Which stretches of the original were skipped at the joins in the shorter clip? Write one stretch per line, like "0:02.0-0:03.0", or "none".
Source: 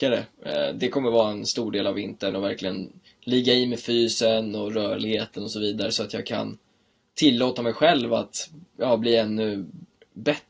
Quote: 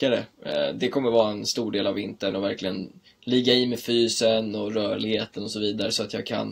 none